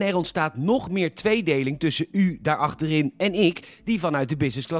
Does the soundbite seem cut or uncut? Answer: uncut